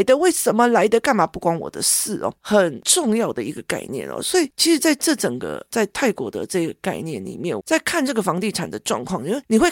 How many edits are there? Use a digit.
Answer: 2